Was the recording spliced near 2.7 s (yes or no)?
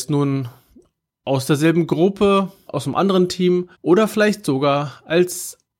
yes